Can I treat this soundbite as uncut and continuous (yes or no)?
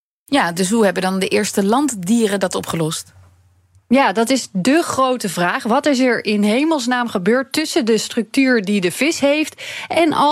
yes